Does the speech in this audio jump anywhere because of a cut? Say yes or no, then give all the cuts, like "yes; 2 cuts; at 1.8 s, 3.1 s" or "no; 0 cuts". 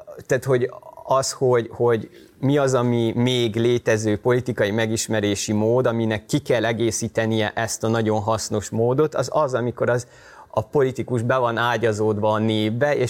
no; 0 cuts